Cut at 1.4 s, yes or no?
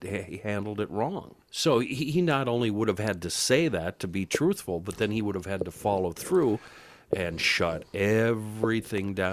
yes